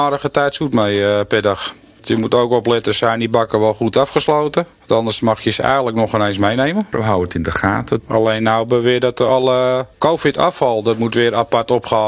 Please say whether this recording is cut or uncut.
cut